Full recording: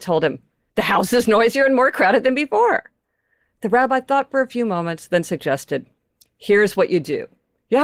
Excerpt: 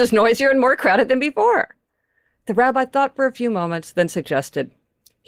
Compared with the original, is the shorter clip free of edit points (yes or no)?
yes